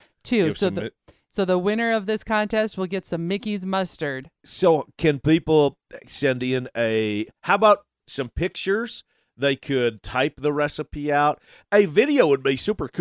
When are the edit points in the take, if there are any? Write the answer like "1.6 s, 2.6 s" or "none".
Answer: none